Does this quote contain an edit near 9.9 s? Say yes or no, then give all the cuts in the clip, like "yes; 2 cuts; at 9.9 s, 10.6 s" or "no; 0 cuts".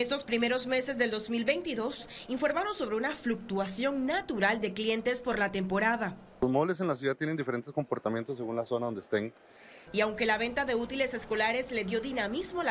yes; 1 cut; at 9.9 s